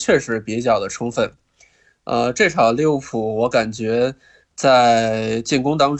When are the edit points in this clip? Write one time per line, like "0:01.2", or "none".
none